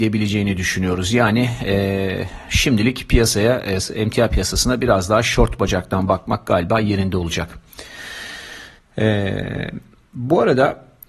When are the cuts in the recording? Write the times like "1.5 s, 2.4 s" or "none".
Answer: none